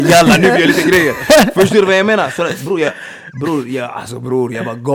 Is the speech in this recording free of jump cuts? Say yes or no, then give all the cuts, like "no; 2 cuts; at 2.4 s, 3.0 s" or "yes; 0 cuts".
yes; 0 cuts